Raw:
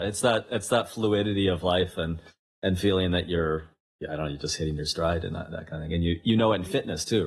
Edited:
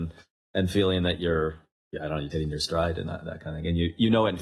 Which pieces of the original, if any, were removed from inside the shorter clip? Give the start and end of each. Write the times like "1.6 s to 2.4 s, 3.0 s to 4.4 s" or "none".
4.4 s to 4.6 s